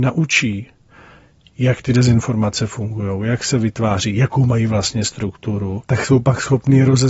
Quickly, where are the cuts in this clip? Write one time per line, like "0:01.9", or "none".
0:05.8